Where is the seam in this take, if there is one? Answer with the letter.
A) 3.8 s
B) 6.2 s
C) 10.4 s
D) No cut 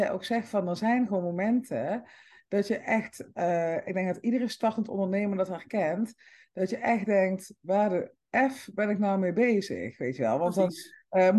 D